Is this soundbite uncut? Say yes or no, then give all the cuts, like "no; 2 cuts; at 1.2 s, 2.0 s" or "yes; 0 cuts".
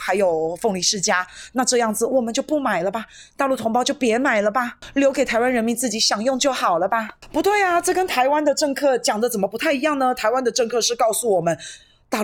yes; 0 cuts